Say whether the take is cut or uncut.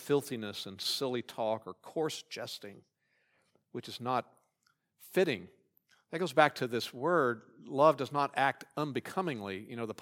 uncut